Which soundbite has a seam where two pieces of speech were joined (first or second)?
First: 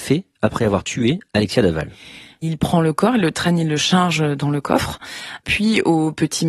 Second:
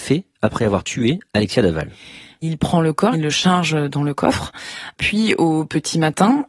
second